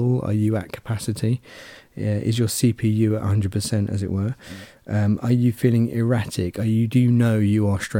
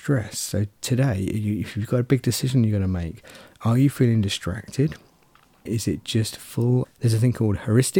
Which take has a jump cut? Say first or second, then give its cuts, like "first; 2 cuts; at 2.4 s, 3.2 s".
second; 2 cuts; at 5.7 s, 6.8 s